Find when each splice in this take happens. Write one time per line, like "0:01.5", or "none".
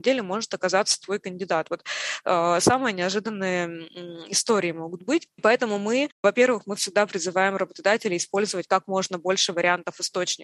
none